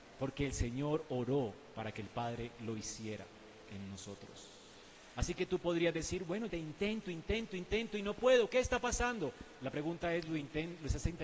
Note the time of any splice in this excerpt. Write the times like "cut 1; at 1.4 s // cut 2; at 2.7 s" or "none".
cut 1; at 6.5 s

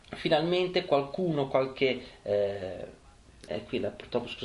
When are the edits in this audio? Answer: cut 1; at 3.5 s

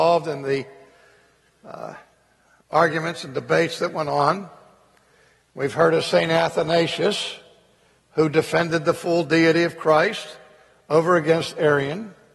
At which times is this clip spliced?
none

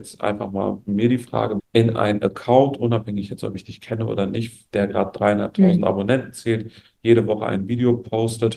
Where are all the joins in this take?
cut 1; at 1.6 s

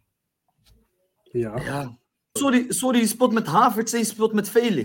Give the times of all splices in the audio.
cut 1; at 2.4 s

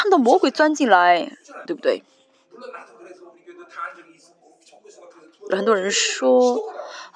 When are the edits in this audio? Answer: cut 1; at 1.7 s // cut 2; at 5.5 s

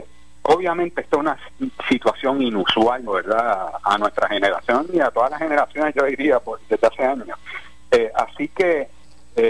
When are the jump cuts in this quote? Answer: cut 1; at 3.1 s

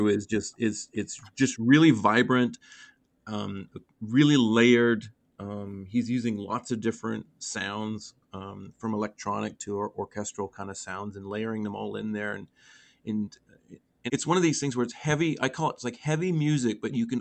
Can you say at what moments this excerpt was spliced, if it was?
cut 1; at 14.1 s

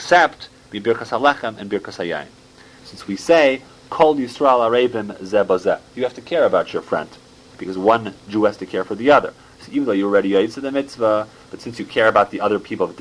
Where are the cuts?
cut 1; at 2.8 s

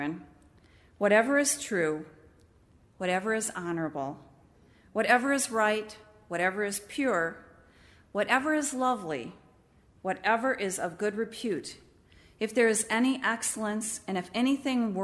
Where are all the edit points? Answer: none

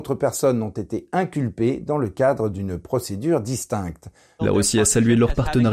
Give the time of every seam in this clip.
cut 1; at 4.4 s

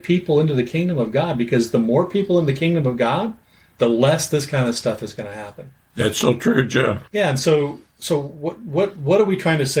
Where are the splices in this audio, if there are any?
cut 1; at 7.1 s

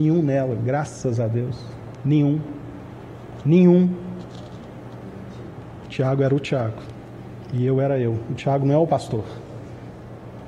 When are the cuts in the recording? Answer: cut 1; at 5.9 s

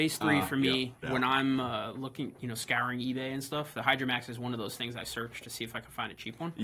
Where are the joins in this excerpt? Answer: cut 1; at 1.0 s

